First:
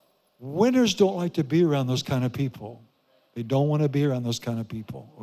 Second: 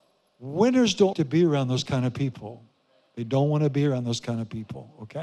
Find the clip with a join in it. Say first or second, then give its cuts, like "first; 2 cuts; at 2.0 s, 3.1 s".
second; 1 cut; at 1.1 s